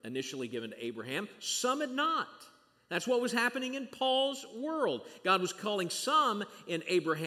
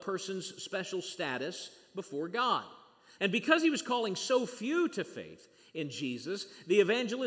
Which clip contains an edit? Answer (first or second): second